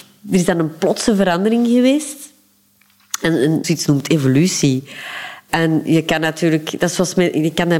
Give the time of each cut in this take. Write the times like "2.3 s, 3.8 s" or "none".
3.6 s